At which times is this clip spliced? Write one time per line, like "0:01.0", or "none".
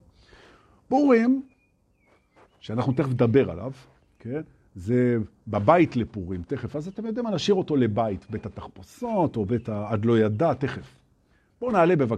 none